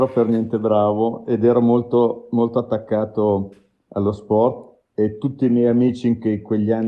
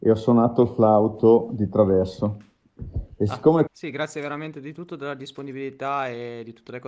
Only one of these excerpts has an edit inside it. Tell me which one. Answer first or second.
second